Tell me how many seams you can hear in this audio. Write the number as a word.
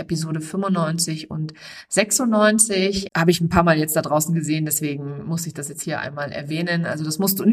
one